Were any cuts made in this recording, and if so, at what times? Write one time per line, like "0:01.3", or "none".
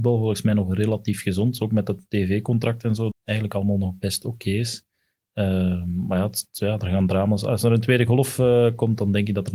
0:03.1